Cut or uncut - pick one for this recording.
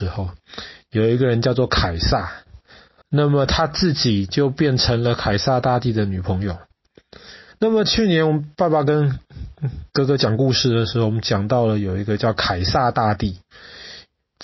cut